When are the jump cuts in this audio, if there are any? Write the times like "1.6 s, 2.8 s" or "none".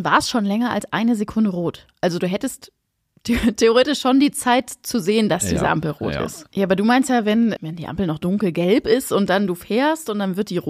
6.5 s, 7.6 s